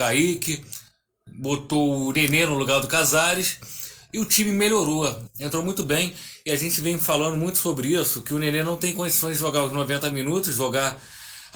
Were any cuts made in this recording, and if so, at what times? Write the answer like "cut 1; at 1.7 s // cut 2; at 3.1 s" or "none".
cut 1; at 5.3 s